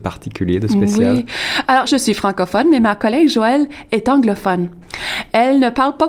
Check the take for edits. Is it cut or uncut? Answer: cut